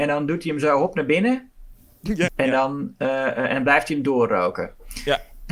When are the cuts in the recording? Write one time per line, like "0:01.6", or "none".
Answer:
0:02.3